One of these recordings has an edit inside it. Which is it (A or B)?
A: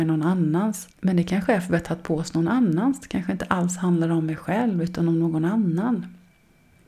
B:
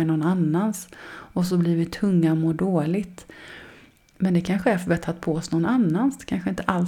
A